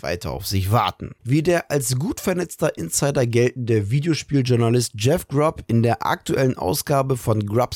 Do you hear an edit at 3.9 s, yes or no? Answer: no